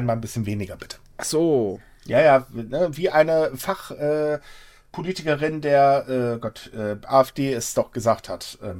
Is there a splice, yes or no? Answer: no